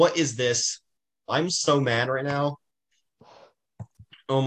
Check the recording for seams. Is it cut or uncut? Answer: cut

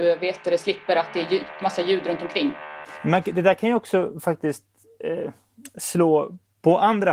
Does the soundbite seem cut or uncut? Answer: uncut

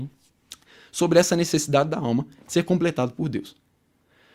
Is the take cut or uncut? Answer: uncut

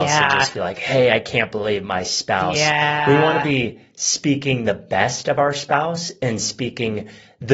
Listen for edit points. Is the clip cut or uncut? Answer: uncut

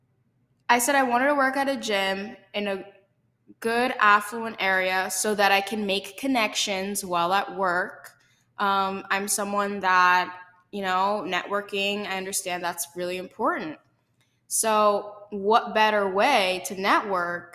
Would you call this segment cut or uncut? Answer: uncut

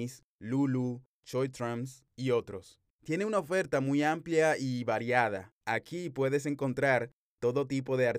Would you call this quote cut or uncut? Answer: cut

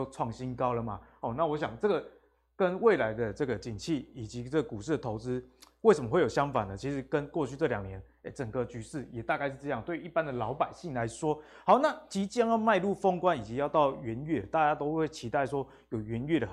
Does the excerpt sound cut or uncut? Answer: uncut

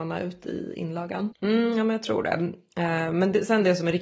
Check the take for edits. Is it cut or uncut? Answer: cut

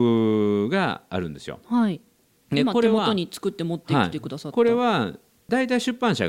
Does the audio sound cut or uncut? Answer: uncut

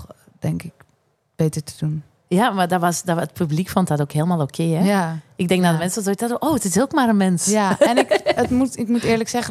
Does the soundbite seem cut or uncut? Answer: uncut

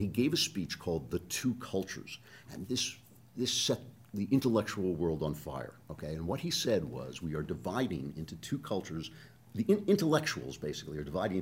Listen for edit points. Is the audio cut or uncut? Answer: uncut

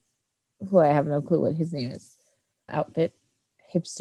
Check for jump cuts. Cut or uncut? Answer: cut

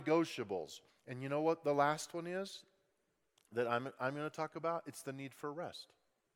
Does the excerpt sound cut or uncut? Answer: cut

